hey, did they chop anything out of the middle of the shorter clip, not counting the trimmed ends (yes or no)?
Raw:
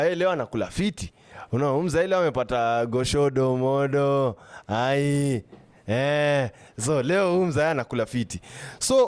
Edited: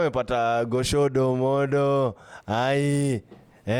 no